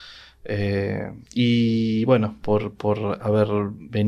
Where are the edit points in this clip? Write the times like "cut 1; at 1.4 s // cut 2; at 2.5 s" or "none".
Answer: cut 1; at 1.3 s // cut 2; at 2.4 s